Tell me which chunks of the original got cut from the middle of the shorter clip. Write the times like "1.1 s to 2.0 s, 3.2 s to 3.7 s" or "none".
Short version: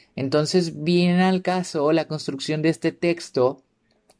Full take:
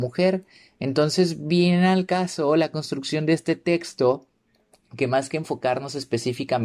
none